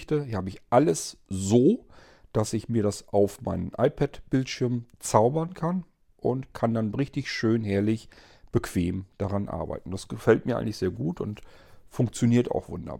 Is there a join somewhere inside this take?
no; 0 cuts

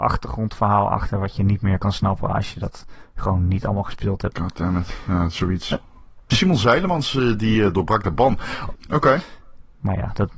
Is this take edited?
yes; 3 cuts; at 4.3 s, 6.3 s, 8.8 s

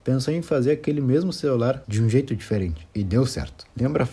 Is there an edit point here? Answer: yes; 1 cut; at 1.8 s

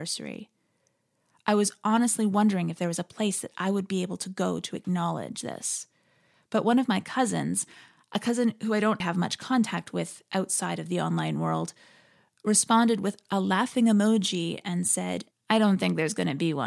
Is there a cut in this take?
yes; 2 cuts; at 9.0 s, 15.3 s

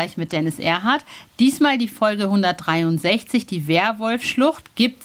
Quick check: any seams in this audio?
yes; 1 cut; at 1.3 s

